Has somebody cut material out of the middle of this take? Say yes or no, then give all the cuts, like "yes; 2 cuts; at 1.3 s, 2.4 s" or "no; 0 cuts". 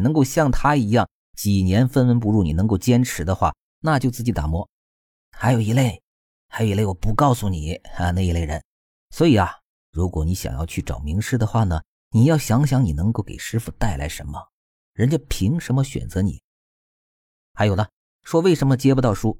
no; 0 cuts